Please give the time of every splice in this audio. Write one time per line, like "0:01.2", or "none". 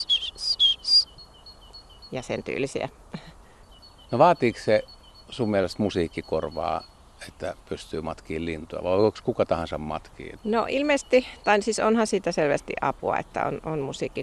0:10.4